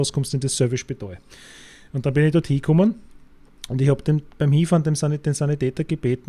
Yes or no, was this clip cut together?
no